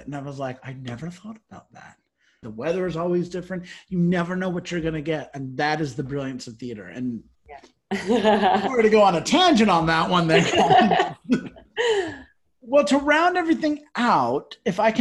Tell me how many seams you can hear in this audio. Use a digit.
1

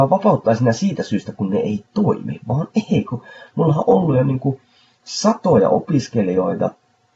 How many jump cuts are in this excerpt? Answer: 0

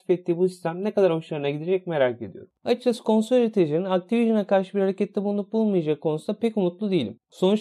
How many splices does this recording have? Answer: 1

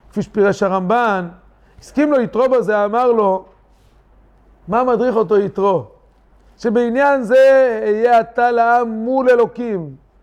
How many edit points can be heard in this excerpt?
0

